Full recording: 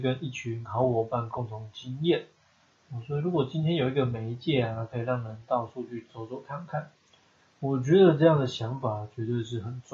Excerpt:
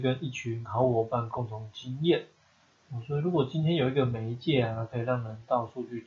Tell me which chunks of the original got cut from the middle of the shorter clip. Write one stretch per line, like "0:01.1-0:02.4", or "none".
none